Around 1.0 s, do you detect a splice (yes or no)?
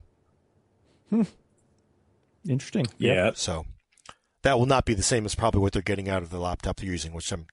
no